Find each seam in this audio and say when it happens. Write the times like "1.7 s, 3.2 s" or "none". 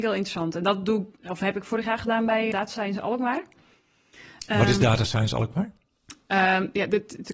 2.5 s